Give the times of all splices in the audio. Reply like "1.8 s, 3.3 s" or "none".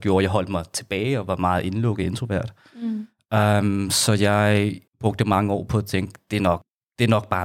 4.9 s